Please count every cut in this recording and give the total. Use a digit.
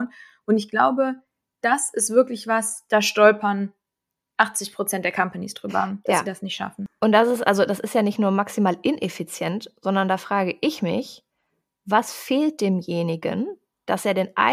0